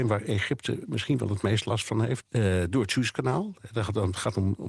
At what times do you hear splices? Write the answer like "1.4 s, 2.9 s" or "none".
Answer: 2.2 s